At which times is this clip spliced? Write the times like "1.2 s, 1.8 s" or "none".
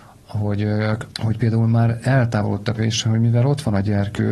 1.1 s, 2.8 s